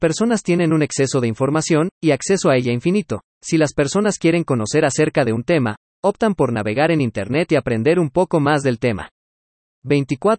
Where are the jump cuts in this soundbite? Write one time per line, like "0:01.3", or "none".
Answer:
none